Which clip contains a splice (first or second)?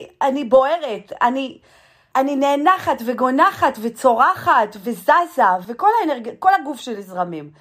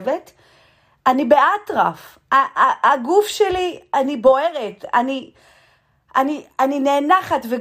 first